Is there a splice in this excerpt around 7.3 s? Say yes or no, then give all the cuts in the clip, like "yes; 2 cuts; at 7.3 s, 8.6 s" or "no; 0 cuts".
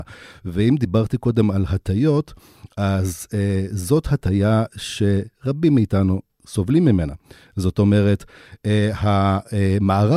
no; 0 cuts